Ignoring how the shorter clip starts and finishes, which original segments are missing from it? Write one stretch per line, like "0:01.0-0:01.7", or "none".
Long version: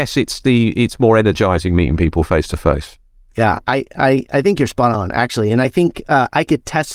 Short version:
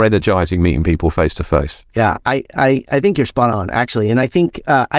0:03.0-0:03.3